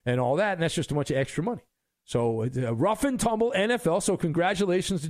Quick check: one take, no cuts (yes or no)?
yes